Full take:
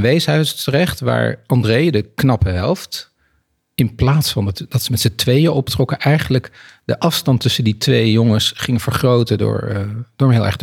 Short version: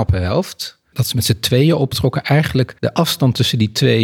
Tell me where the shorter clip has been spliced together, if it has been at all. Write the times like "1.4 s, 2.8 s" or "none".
0.9 s, 2.8 s